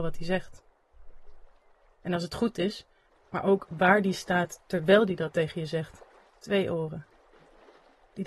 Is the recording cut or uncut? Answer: cut